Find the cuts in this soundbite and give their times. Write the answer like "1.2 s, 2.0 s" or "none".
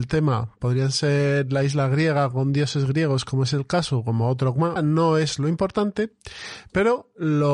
4.8 s